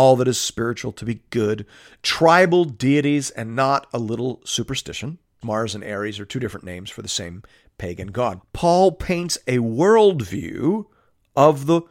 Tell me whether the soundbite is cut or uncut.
cut